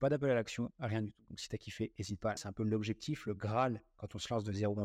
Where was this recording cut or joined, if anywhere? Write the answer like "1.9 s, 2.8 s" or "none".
1.3 s, 2.4 s